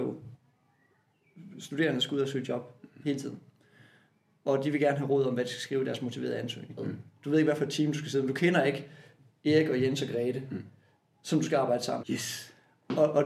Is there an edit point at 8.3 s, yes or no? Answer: no